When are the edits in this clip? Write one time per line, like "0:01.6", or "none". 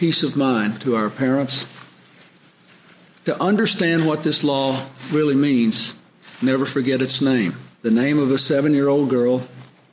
0:07.7